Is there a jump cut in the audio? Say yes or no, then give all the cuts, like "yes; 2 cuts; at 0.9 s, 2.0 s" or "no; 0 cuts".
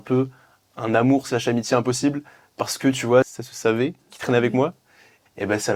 no; 0 cuts